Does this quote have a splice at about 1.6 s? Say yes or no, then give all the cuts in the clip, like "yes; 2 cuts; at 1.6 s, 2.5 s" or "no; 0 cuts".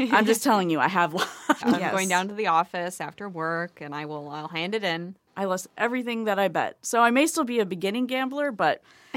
yes; 2 cuts; at 1.6 s, 5.3 s